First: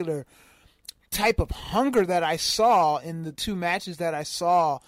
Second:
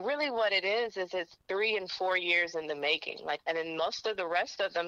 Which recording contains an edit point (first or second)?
second